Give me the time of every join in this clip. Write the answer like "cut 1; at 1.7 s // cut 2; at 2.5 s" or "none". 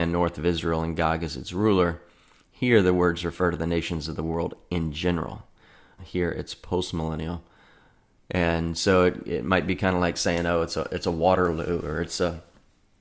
cut 1; at 6.0 s